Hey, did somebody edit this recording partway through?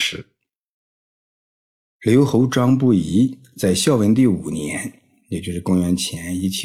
no; 0 cuts

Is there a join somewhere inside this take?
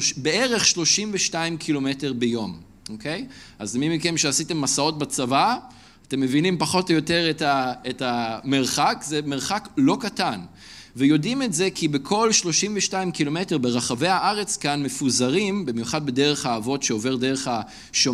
no; 0 cuts

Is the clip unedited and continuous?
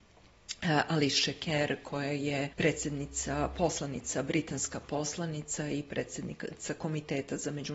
no; 1 cut; at 2.5 s

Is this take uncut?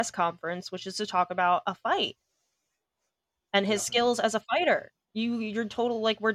yes; 0 cuts

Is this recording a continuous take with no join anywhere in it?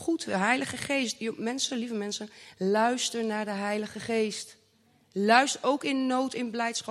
yes; 0 cuts

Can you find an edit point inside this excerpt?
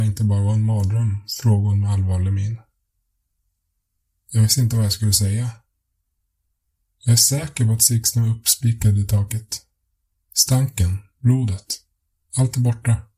no; 0 cuts

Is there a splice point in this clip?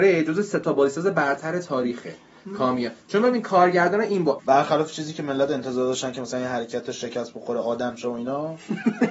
yes; 1 cut; at 4.4 s

